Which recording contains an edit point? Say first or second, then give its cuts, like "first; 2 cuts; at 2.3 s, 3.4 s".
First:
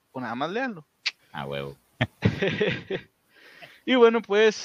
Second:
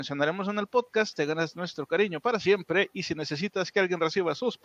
first; 1 cut; at 1.2 s